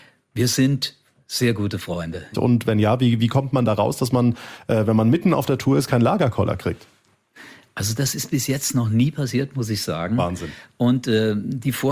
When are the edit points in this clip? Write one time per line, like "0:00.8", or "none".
0:02.3